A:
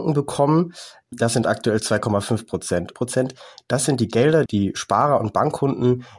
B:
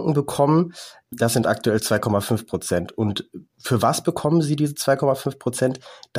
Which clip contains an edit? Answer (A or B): A